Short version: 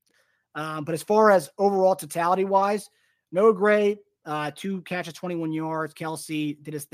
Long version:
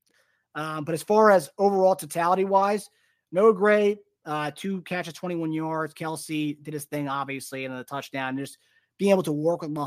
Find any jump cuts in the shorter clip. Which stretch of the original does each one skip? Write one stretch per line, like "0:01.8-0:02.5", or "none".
none